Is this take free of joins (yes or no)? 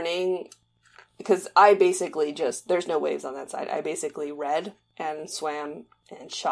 yes